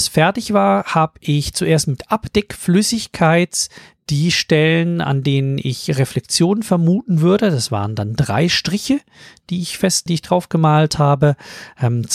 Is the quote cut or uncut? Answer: cut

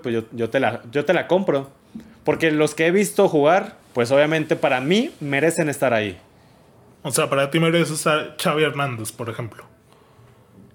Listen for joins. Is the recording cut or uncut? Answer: cut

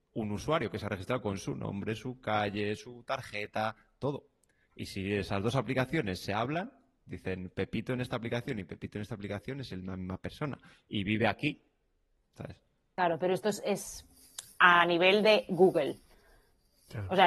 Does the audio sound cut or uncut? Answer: uncut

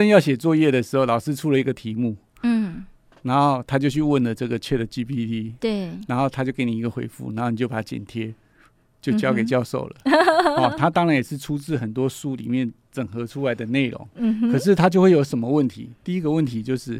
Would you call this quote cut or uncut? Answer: uncut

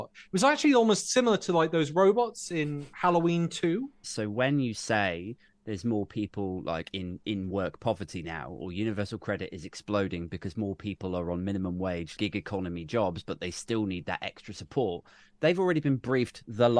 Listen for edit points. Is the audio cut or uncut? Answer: cut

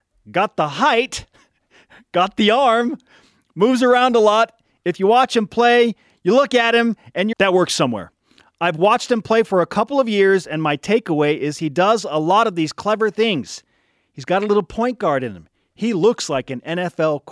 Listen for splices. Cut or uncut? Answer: cut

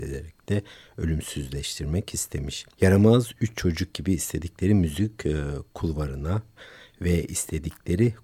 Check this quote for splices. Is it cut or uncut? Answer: cut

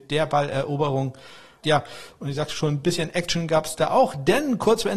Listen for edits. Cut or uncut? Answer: cut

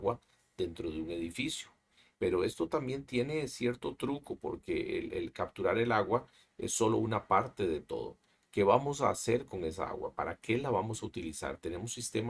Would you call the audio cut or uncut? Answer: cut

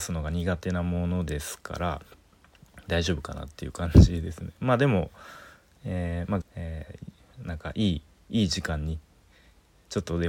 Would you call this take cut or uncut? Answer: cut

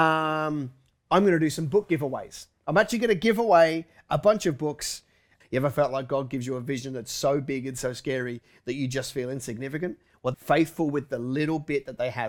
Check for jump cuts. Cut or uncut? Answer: cut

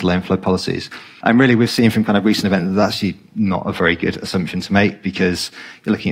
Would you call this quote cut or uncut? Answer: cut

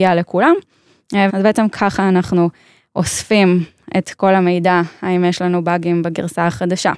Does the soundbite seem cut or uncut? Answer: cut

